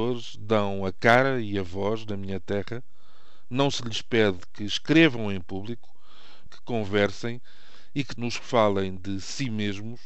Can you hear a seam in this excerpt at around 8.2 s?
yes; 2 cuts; at 6.5 s, 8.2 s

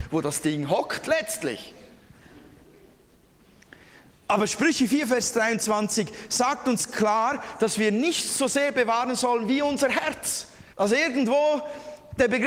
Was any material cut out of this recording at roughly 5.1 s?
no; 1 cut; at 10.7 s

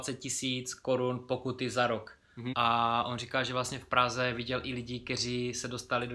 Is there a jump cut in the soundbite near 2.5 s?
yes; 1 cut; at 2.5 s

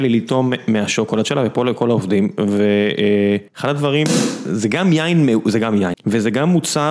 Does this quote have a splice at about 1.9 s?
no; 2 cuts; at 3.5 s, 5.9 s

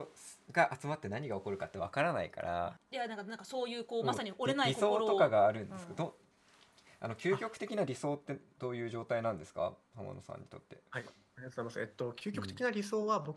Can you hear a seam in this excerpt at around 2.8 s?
yes; 1 cut; at 2.8 s

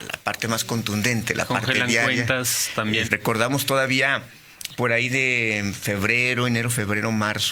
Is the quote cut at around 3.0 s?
yes; 1 cut; at 3.0 s

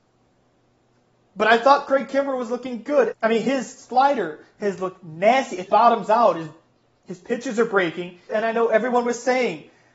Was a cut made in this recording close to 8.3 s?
yes; 3 cuts; at 3.1 s, 5.7 s, 8.3 s

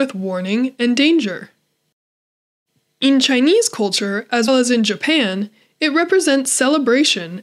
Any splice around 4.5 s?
yes; 1 cut; at 4.5 s

